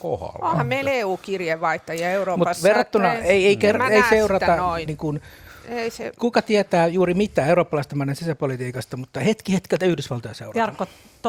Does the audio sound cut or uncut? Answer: cut